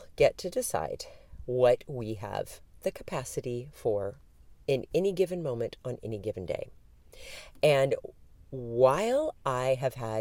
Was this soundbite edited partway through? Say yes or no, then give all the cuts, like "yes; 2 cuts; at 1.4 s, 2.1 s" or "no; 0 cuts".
no; 0 cuts